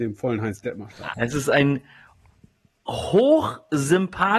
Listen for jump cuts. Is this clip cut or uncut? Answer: cut